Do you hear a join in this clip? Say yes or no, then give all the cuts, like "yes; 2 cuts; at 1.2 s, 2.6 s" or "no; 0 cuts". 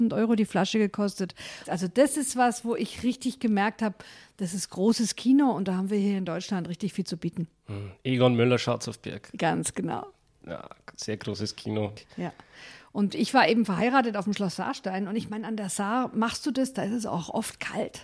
yes; 1 cut; at 1.6 s